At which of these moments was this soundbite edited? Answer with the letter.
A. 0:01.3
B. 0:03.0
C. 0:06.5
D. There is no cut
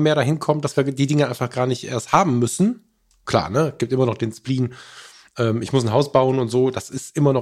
D